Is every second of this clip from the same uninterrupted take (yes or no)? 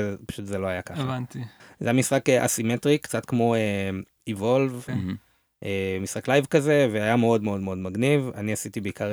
no